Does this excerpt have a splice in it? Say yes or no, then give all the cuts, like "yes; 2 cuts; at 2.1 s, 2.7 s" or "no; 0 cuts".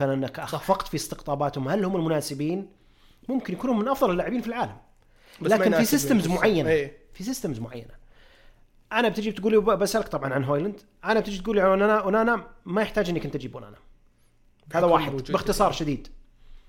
no; 0 cuts